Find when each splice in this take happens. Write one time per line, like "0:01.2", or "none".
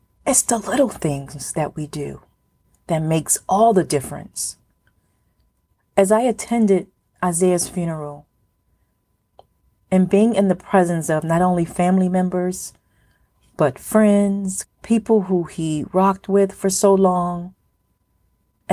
0:14.6

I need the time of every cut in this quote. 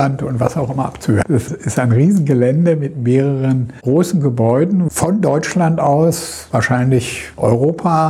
0:01.2
0:04.9

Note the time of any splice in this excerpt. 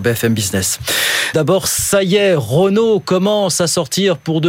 0:01.3

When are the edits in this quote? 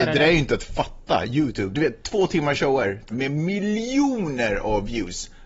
0:01.7
0:03.1

